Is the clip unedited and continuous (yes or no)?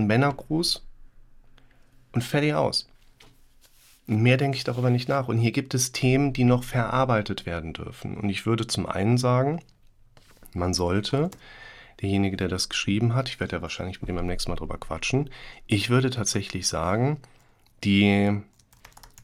yes